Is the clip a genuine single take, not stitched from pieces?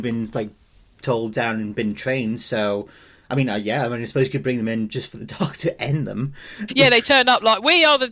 no; 1 cut; at 6.7 s

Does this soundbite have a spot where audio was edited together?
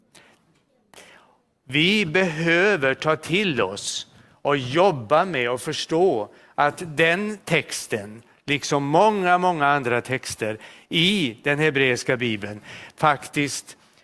no; 0 cuts

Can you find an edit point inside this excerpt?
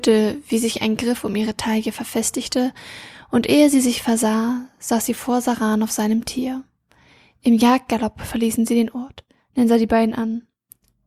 yes; 1 cut; at 9.4 s

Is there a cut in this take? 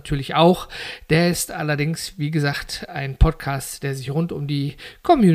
no; 0 cuts

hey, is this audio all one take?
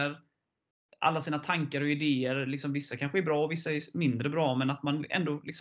yes; 0 cuts

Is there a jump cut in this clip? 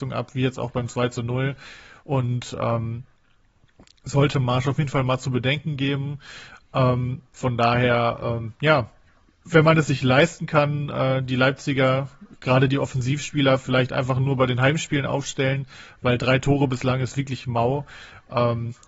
yes; 2 cuts; at 2.0 s, 7.3 s

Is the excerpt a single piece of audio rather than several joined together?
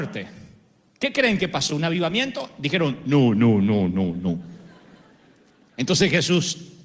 yes; 0 cuts

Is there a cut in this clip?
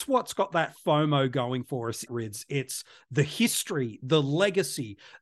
yes; 1 cut; at 2.1 s

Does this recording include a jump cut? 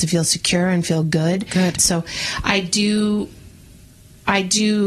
yes; 1 cut; at 1.8 s

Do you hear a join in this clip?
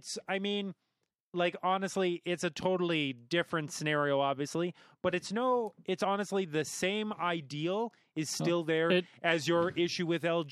no; 0 cuts

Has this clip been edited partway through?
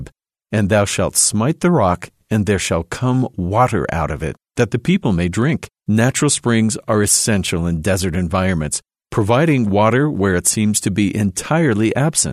yes; 1 cut; at 5.8 s

